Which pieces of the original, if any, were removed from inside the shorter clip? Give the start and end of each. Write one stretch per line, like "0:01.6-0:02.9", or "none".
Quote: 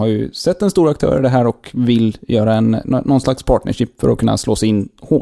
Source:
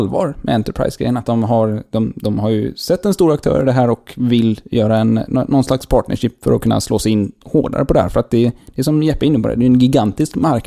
none